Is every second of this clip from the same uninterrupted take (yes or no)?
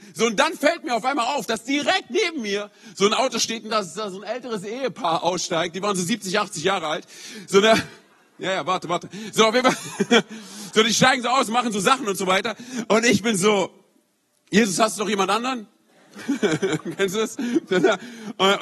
yes